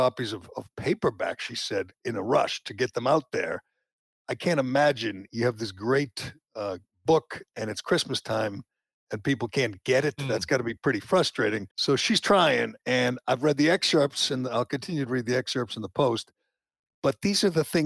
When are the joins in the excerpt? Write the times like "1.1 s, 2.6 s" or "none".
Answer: 11.7 s